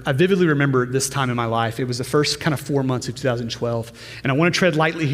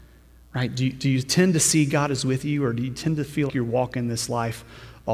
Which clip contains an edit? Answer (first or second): second